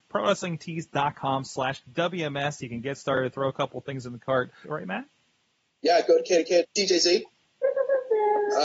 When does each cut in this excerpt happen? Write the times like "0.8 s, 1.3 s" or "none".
4.6 s, 6.6 s